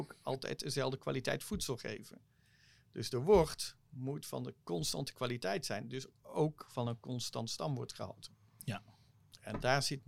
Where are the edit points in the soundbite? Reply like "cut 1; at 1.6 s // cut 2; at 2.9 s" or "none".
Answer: none

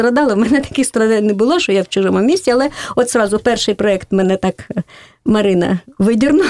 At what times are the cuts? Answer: none

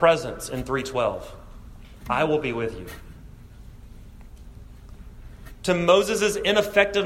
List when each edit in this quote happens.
none

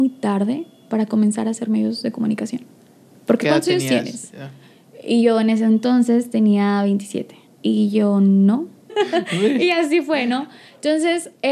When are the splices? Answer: cut 1; at 7.5 s // cut 2; at 8.9 s

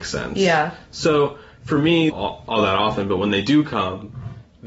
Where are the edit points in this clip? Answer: cut 1; at 2.1 s

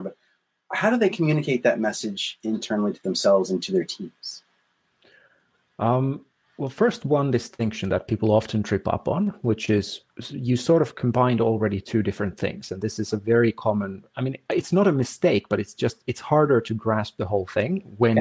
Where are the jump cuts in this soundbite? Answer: none

